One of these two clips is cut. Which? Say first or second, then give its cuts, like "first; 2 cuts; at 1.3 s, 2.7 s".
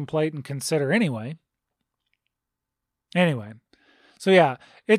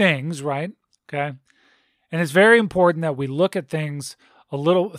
second; 1 cut; at 0.9 s